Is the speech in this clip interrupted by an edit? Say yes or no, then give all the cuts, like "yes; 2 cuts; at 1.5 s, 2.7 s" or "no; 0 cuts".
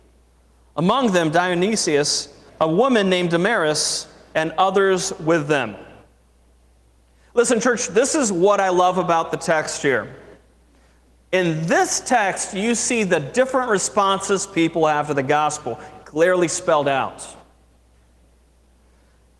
yes; 1 cut; at 2.5 s